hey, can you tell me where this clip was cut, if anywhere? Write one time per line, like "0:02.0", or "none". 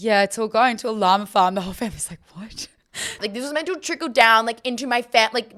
0:03.2